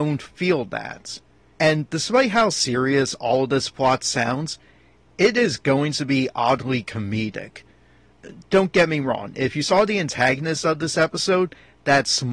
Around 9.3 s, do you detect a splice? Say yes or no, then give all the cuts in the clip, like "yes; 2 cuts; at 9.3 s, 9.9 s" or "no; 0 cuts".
no; 1 cut; at 1.5 s